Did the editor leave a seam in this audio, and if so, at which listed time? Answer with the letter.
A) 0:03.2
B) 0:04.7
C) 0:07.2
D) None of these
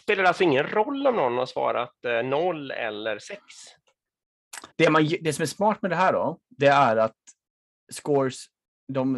B